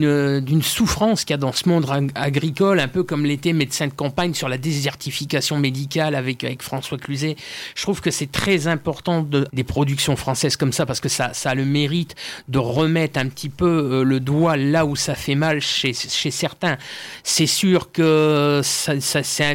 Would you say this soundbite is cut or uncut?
cut